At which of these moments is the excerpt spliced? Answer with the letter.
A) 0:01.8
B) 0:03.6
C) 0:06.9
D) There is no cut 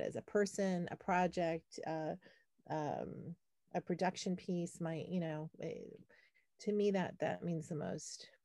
D